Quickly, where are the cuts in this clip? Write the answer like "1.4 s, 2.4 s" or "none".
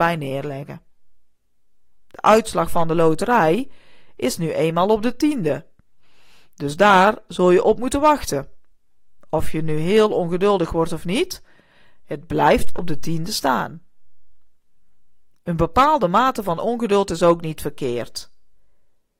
none

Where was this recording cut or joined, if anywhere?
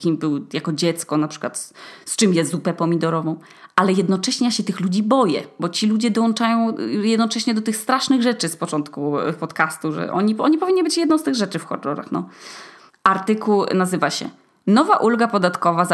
12.9 s

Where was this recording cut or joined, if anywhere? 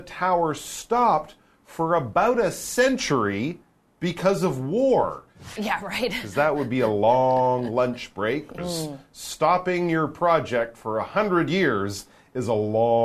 5.6 s, 8.6 s

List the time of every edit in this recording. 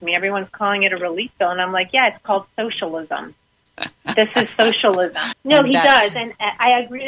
3.6 s, 5.3 s

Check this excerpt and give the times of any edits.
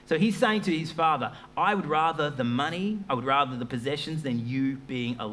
none

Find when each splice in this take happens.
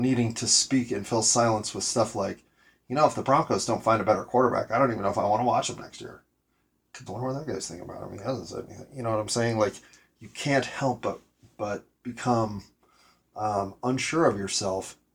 7.1 s

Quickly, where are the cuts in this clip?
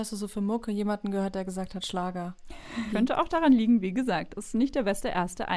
2.9 s

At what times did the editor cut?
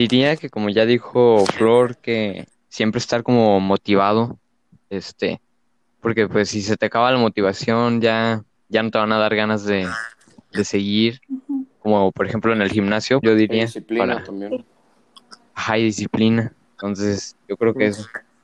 13.2 s

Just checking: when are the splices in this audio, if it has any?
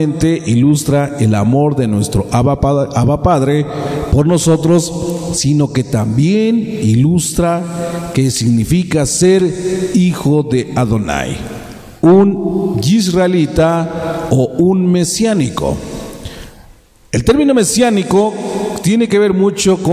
none

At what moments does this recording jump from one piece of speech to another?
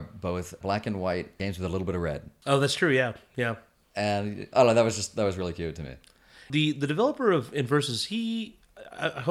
none

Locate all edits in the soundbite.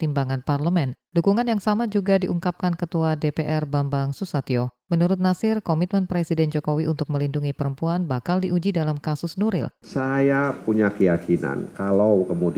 9.8 s

